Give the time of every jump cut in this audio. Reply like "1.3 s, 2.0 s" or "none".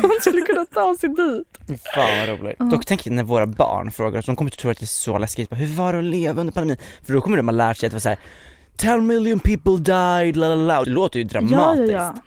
10.8 s